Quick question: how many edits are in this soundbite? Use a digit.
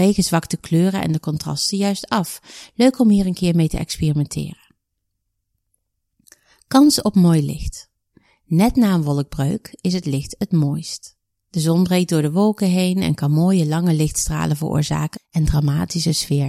1